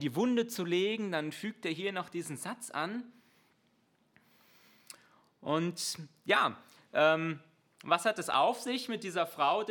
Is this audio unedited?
yes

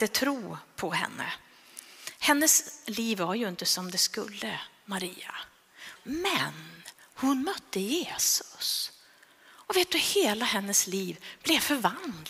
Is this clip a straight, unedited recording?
no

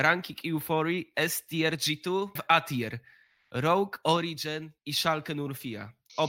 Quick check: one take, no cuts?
no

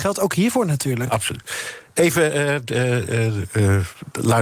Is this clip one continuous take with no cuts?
yes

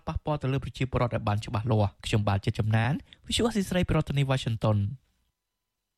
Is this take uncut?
no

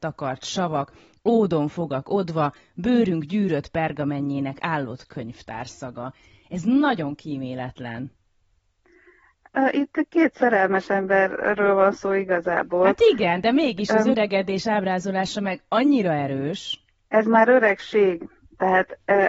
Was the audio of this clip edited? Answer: no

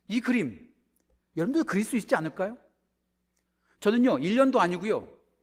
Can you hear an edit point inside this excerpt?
no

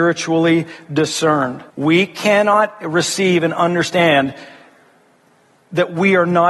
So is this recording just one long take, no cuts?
no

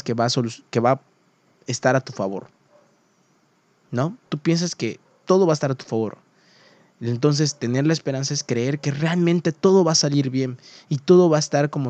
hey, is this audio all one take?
no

